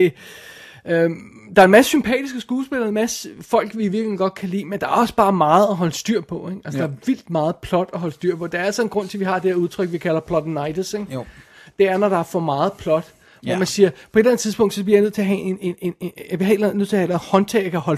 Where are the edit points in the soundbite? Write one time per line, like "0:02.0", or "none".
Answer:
none